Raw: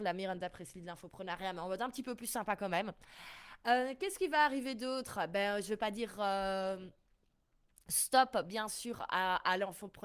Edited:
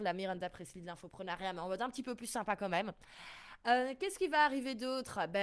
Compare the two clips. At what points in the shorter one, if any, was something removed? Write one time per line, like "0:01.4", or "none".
none